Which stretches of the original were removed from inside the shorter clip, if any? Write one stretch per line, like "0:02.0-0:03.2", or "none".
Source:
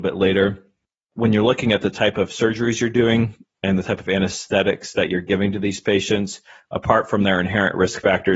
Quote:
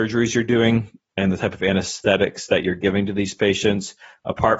none